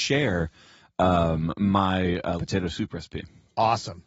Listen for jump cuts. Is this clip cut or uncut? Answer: cut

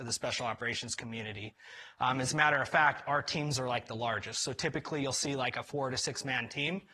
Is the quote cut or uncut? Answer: uncut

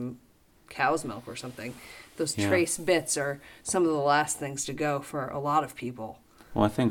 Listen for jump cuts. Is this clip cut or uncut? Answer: uncut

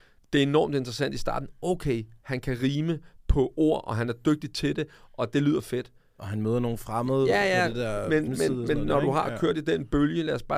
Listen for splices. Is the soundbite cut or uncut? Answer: cut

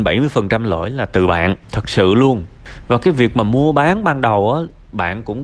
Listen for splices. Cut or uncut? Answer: cut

